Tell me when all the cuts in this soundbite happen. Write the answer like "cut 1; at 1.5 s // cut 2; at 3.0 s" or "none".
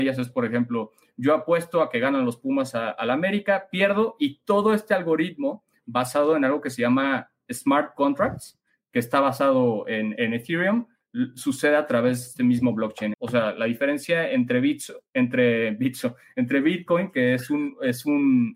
cut 1; at 13.1 s

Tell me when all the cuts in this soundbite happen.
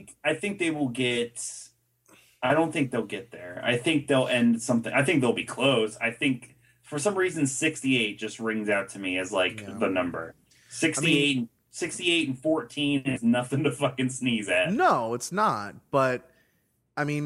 none

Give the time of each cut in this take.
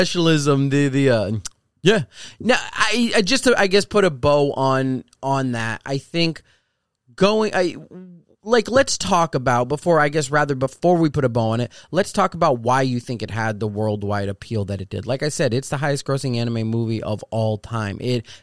none

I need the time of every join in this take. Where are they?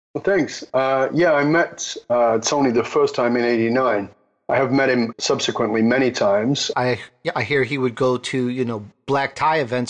cut 1; at 5.1 s // cut 2; at 6.7 s

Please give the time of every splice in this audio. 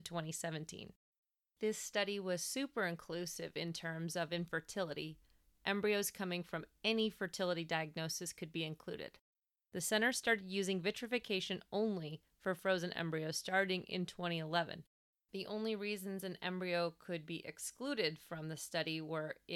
cut 1; at 9.6 s // cut 2; at 15.1 s

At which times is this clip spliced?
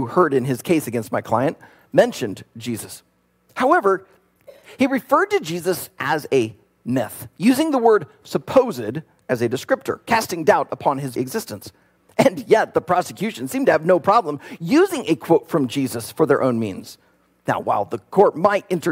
cut 1; at 11.2 s

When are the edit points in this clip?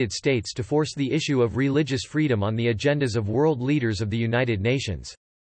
none

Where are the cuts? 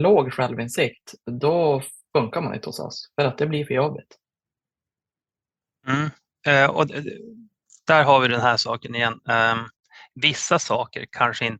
none

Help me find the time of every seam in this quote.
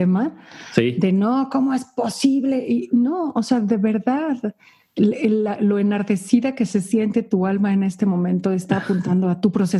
none

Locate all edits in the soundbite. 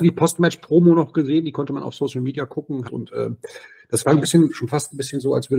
cut 1; at 2.8 s

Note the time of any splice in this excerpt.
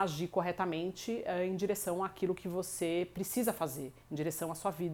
none

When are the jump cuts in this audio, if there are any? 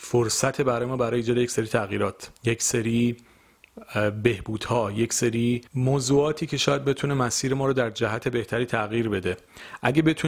cut 1; at 2.4 s // cut 2; at 5.7 s

